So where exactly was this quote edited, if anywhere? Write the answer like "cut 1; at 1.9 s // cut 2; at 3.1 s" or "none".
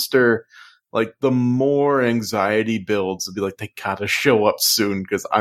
none